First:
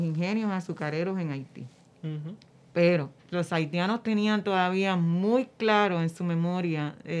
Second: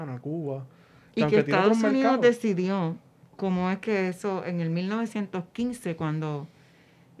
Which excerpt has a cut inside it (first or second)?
first